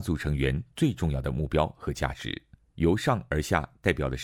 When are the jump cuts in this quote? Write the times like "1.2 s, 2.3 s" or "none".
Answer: 2.6 s